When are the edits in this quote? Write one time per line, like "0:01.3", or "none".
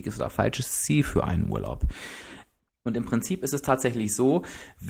0:02.7